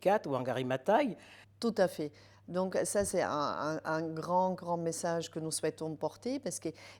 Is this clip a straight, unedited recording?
no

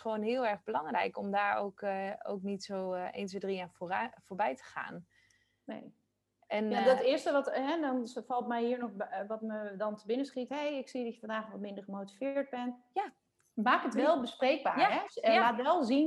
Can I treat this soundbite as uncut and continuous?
no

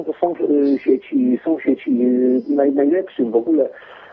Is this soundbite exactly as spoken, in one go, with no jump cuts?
yes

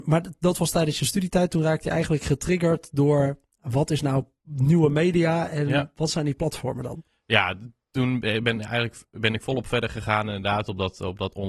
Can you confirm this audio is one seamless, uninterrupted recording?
yes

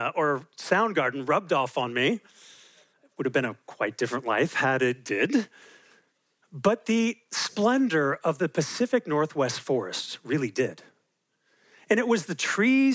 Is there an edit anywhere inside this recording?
no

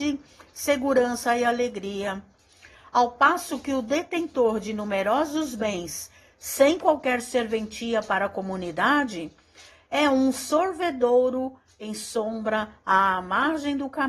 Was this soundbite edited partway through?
no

